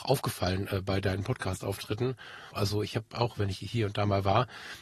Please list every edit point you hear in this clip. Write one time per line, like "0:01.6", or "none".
0:02.5